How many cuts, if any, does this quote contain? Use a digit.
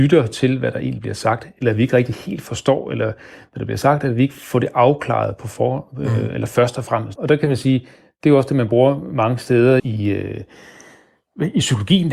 2